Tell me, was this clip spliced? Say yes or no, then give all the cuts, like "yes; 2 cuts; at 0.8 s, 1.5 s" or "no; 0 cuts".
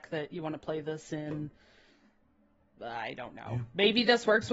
no; 0 cuts